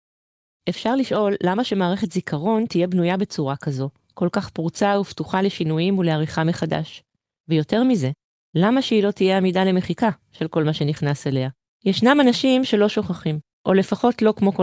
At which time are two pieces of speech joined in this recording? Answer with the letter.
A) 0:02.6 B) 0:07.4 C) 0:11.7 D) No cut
C